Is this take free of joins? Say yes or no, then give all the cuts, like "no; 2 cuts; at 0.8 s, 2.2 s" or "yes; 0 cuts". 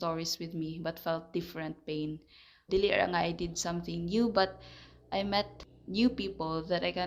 no; 1 cut; at 2.7 s